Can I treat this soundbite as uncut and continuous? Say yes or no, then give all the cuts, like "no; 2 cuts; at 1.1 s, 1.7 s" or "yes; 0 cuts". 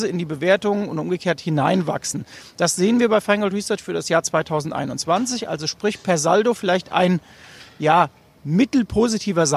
yes; 0 cuts